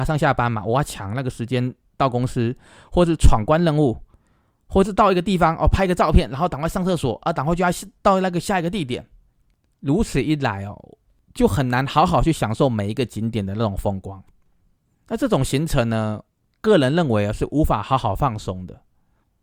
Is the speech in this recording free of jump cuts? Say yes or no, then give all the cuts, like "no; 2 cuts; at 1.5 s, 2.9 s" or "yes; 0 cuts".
yes; 0 cuts